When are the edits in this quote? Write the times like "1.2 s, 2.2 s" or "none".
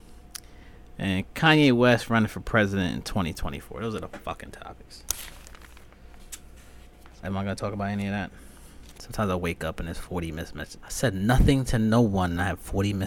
7.2 s, 9.0 s, 10.8 s